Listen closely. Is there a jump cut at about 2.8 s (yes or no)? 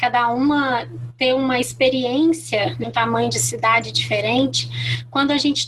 yes